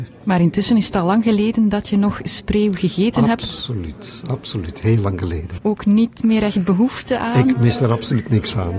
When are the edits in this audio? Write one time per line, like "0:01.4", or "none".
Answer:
0:05.6